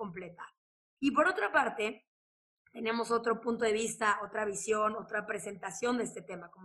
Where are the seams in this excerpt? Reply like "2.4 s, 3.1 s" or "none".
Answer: 1.0 s